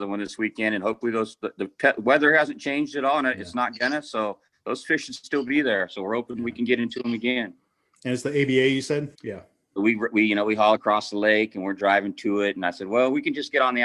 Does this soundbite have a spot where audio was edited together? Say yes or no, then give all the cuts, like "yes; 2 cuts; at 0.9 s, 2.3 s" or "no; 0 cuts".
yes; 2 cuts; at 9.1 s, 10.8 s